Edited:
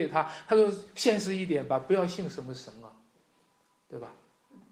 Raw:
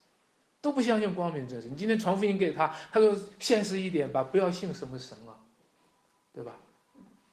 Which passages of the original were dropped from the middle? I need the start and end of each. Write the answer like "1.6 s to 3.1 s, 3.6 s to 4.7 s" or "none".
none

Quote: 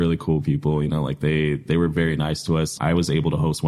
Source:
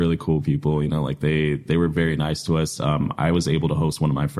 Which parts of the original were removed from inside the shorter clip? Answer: 2.8 s to 3.2 s

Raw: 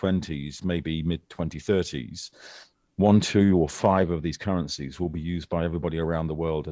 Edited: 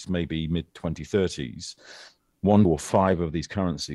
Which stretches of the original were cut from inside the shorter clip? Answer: 3.2 s to 3.5 s

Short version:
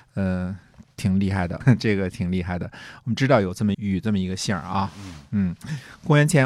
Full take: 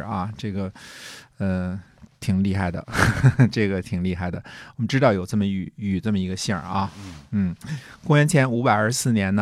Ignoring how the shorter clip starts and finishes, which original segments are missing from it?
2.8 s to 3.3 s, 5.5 s to 5.7 s

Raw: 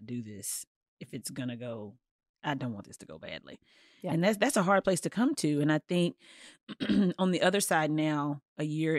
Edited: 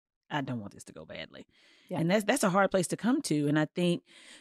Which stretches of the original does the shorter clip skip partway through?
none

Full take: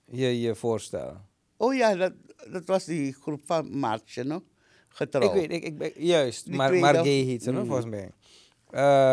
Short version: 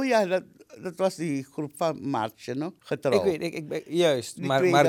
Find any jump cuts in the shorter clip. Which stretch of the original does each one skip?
4.5 s to 4.9 s

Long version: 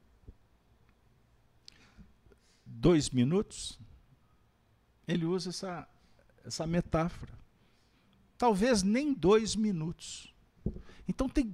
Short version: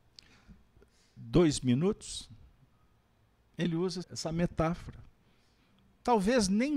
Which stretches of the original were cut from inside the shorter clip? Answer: 5.5 s to 6.4 s

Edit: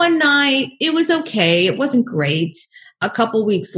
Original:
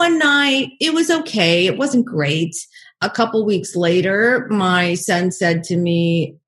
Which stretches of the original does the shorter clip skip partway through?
none

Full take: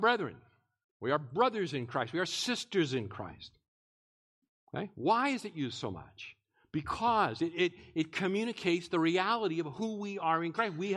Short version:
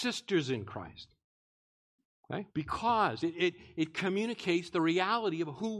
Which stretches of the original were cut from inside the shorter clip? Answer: 4.9 s to 6.7 s

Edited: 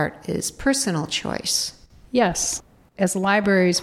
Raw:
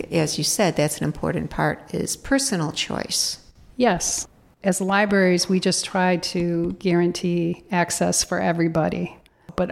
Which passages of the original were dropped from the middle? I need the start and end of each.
none

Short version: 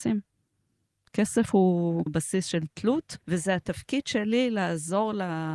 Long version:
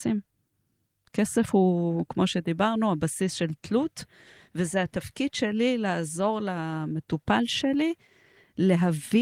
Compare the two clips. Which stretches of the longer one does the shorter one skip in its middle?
2.1 s to 2.9 s, 4.1 s to 4.5 s

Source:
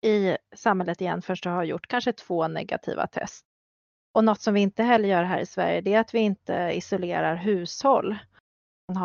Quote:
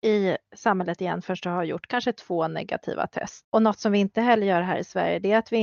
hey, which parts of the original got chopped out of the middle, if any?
3.4 s to 4.1 s

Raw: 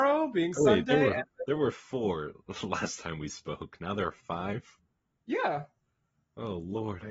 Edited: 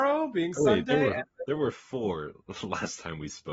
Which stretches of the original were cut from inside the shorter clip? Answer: none

